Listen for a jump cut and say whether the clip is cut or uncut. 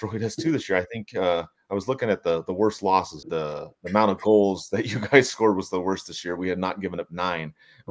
cut